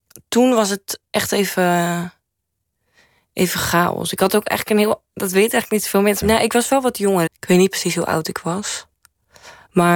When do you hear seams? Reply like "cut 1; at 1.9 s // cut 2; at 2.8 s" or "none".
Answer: cut 1; at 6.2 s // cut 2; at 7.3 s